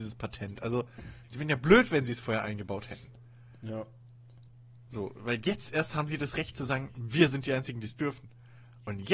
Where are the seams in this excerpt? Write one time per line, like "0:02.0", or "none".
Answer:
none